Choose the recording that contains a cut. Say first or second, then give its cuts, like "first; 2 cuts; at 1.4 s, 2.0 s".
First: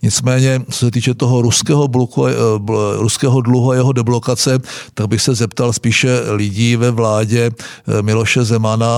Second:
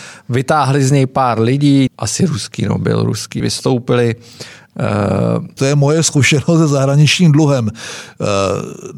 second; 3 cuts; at 1.9 s, 3.4 s, 5.6 s